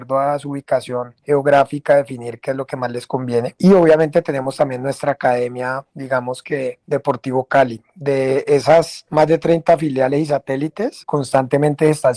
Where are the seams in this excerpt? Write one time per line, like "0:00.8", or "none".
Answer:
none